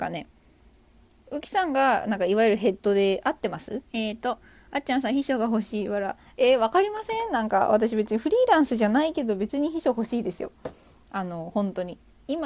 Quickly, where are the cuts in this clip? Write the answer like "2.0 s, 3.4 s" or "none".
3.9 s